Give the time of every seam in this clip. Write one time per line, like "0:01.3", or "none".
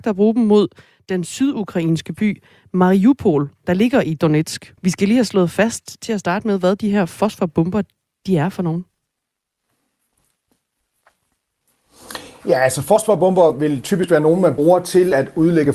0:04.8